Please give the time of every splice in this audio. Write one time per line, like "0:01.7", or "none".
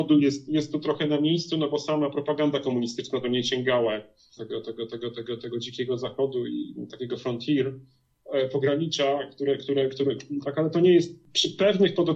0:04.4
0:10.4